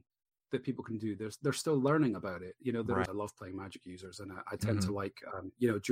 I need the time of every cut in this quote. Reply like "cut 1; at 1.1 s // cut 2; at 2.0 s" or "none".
cut 1; at 3.1 s